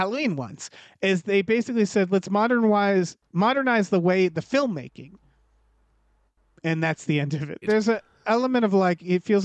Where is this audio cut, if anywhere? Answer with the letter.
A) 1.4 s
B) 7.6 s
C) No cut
B